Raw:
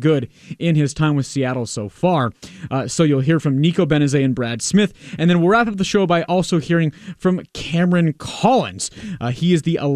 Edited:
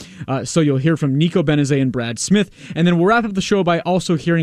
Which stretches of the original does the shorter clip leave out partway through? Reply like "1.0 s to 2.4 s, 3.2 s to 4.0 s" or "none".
none